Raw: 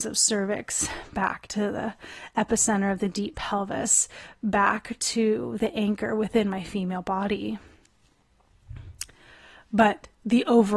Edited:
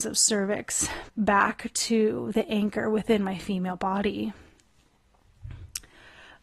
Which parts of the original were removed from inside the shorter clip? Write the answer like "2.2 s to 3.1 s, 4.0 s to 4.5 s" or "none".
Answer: 1.1 s to 4.3 s